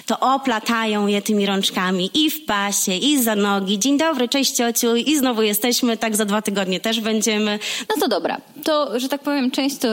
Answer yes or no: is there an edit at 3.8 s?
no